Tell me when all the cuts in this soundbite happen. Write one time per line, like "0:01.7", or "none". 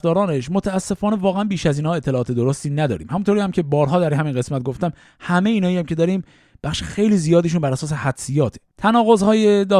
0:08.7